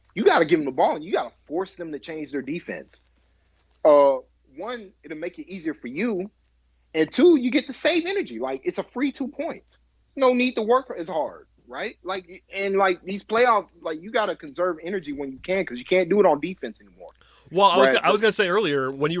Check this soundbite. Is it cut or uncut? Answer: uncut